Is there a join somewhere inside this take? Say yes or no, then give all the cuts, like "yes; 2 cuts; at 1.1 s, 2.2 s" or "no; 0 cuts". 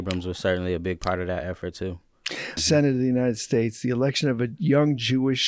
yes; 1 cut; at 2.6 s